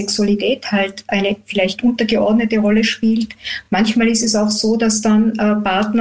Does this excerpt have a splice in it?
no; 0 cuts

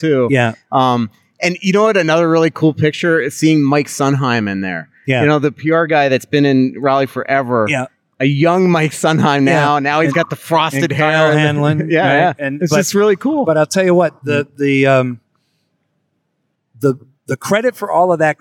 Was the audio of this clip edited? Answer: yes; 1 cut; at 14.2 s

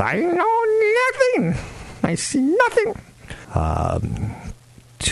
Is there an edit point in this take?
yes; 1 cut; at 3.4 s

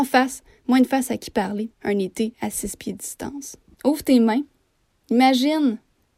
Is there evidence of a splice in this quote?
yes; 2 cuts; at 1.7 s, 3.7 s

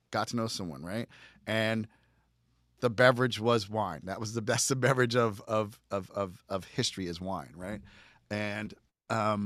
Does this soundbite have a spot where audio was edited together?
no; 0 cuts

